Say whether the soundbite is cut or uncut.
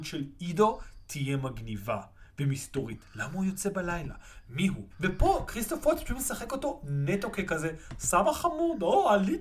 cut